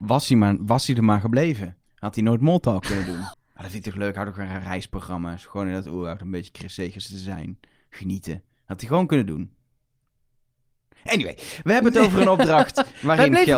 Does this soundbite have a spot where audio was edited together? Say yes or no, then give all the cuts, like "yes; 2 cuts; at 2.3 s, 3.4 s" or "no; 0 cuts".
yes; 1 cut; at 3.3 s